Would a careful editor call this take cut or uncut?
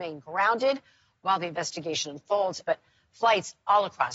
cut